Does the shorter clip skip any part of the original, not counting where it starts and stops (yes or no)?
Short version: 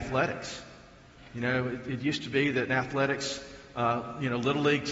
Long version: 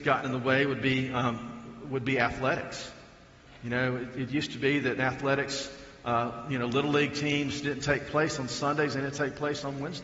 no